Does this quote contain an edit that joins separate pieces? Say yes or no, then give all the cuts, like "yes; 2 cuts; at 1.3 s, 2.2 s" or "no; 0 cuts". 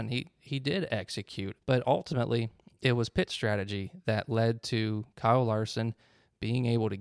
yes; 1 cut; at 1.6 s